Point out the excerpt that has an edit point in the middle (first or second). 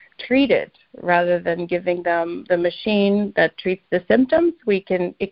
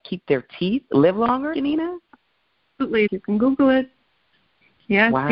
second